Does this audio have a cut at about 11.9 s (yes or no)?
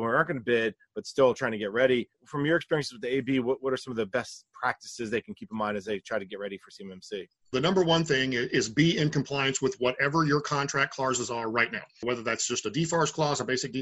no